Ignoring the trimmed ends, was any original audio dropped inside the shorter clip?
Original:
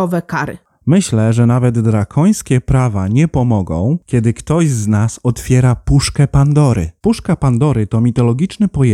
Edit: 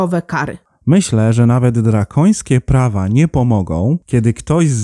no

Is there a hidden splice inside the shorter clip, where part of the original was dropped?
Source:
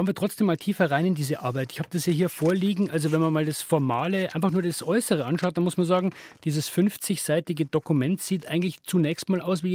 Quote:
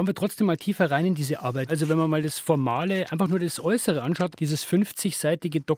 yes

